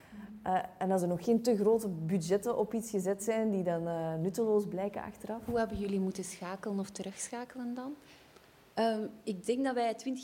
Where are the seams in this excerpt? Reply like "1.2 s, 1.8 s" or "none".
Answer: none